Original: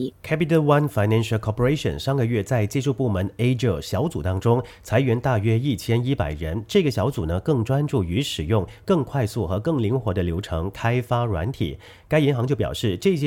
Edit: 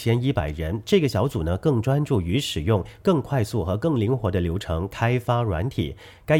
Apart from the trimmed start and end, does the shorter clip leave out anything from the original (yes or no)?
no